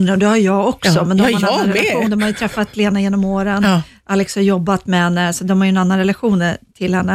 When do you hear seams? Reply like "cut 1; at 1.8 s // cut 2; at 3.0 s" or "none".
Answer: none